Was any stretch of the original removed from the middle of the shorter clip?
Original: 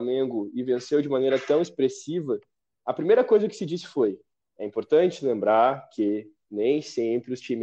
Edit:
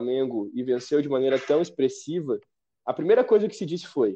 no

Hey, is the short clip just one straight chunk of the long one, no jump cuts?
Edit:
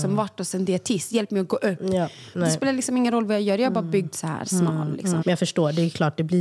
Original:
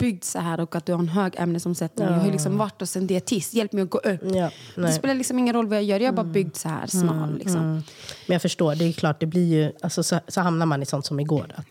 no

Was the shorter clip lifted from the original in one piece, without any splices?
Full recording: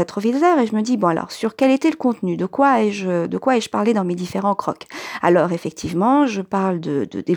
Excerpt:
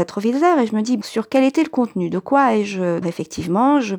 no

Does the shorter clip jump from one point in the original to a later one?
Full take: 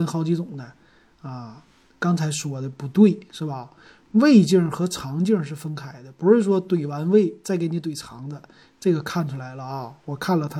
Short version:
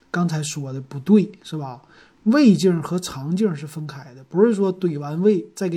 no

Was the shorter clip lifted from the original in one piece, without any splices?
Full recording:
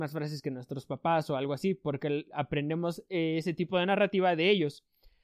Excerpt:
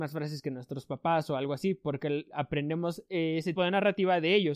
no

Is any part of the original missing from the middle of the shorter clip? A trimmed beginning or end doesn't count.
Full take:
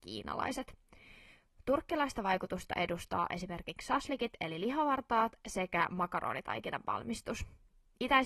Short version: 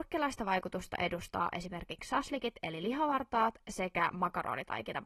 no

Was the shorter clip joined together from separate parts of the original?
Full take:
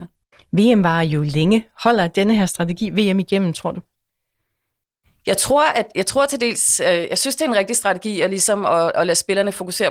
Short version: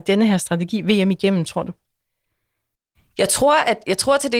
no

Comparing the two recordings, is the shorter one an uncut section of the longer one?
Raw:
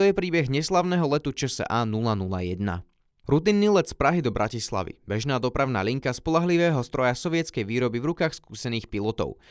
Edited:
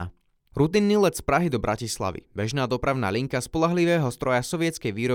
yes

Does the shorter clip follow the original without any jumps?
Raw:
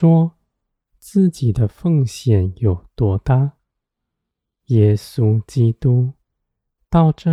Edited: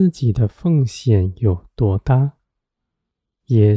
yes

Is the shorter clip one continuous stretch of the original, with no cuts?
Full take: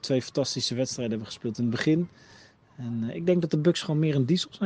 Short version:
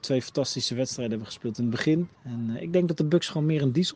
no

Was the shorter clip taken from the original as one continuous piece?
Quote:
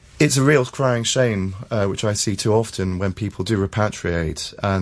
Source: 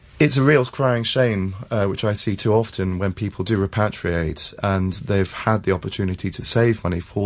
yes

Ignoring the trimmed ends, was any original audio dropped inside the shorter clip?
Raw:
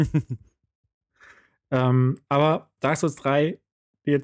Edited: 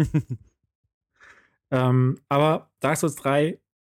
no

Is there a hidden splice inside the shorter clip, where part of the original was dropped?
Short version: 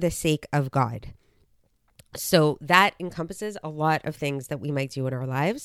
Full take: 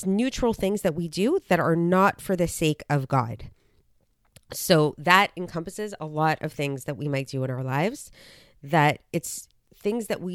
no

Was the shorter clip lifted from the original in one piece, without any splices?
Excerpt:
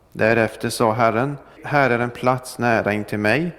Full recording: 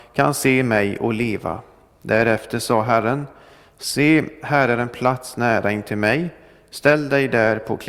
no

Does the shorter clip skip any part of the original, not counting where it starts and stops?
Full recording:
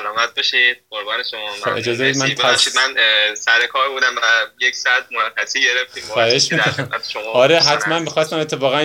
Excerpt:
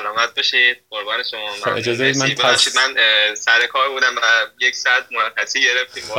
no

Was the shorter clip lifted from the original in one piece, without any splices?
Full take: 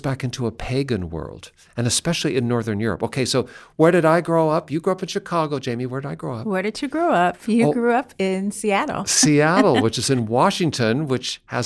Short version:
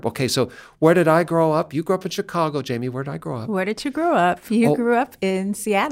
yes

